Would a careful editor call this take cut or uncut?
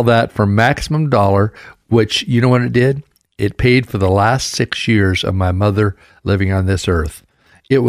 uncut